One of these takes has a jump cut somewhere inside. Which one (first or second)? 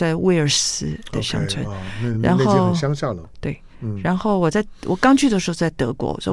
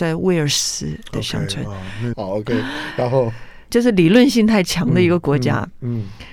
second